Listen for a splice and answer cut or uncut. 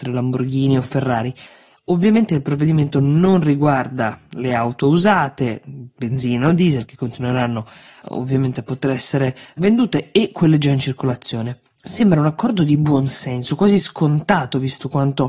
uncut